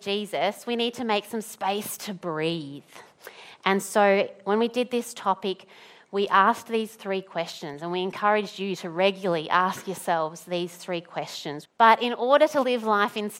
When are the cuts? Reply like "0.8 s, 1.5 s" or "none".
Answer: 11.7 s